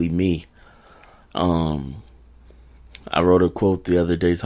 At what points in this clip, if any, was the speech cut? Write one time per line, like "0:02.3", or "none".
none